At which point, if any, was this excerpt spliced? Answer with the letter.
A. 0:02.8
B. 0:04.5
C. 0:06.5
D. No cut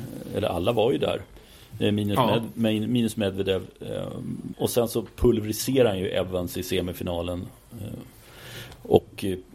B